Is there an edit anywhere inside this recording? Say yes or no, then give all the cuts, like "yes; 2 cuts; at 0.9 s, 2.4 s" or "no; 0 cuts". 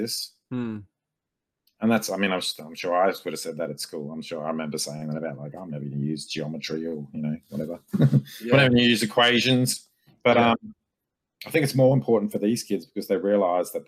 no; 0 cuts